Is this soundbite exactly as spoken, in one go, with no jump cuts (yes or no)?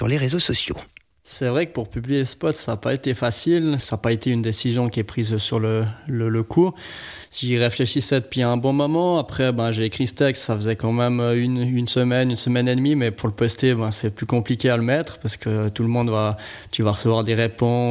yes